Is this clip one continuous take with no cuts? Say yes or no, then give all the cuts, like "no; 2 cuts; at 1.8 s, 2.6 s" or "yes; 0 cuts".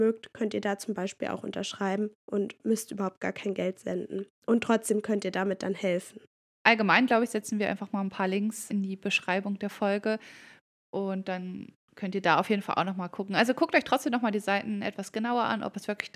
yes; 0 cuts